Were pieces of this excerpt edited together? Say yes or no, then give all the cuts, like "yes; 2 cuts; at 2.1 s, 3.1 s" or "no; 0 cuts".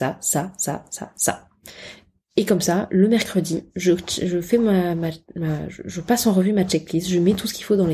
no; 0 cuts